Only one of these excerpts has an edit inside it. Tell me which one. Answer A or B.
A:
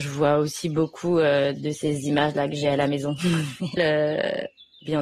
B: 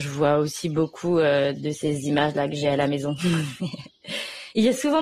A